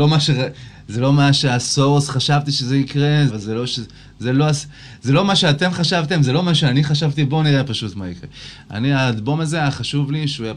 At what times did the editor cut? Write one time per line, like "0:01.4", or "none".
0:03.3